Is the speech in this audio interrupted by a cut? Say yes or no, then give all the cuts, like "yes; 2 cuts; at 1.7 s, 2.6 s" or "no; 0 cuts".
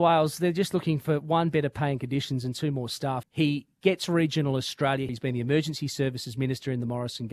yes; 2 cuts; at 3.2 s, 5.1 s